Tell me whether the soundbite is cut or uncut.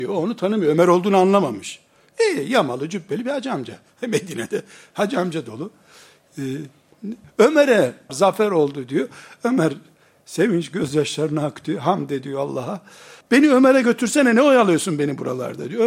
cut